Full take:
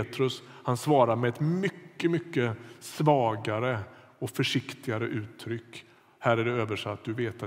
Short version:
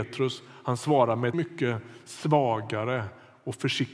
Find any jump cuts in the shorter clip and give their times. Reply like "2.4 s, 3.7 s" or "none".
1.3 s